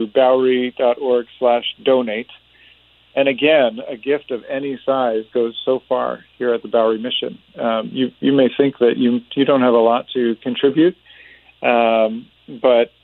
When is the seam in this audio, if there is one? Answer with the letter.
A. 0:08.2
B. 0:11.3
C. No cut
C